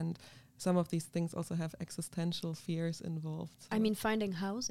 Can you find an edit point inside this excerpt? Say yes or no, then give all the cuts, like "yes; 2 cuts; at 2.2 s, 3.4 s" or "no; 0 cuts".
no; 0 cuts